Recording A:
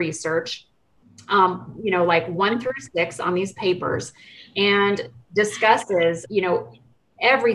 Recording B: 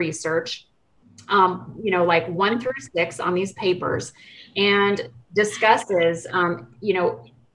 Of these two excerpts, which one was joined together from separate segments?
A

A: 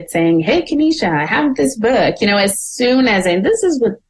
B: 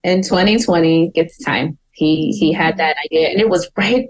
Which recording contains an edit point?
B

